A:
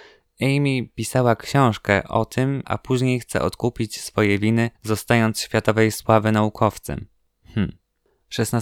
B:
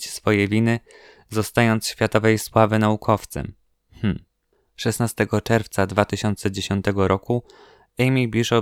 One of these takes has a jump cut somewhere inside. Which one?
A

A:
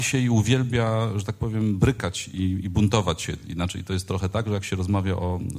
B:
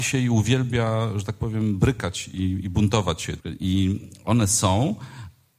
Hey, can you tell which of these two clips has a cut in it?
B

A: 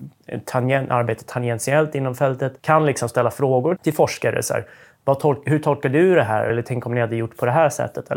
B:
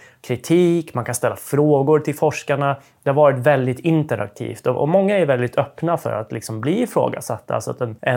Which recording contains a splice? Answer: A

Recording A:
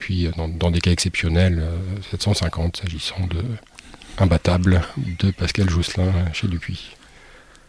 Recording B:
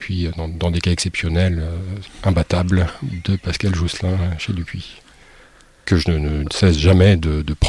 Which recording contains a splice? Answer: B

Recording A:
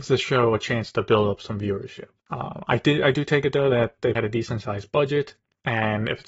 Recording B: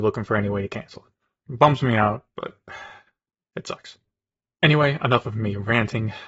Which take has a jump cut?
A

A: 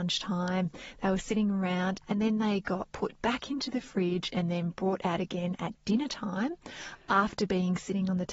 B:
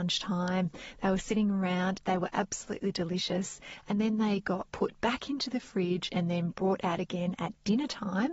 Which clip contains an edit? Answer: A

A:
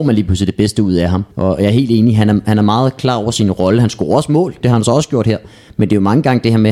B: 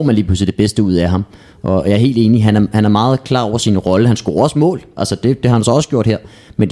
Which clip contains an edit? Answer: A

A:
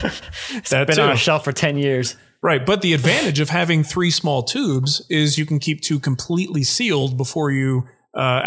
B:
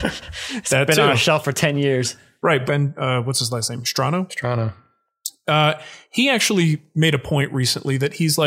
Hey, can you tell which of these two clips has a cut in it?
B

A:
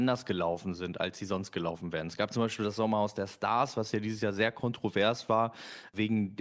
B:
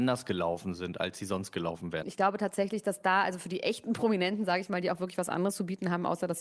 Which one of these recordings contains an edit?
B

